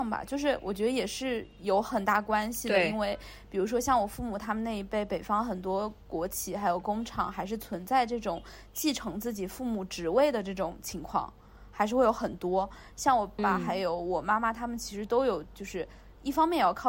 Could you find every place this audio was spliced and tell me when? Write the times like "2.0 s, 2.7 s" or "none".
13.4 s